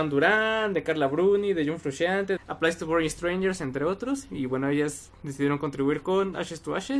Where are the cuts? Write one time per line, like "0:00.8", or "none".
0:02.4

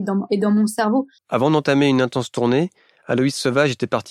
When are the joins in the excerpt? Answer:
0:01.2

